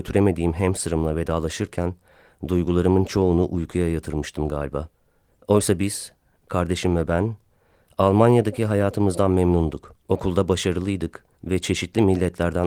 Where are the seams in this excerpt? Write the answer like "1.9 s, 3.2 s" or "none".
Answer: 5.3 s, 10.0 s, 11.3 s